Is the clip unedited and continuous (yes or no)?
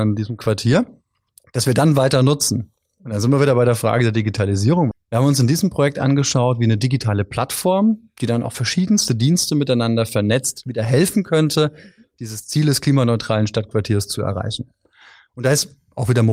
no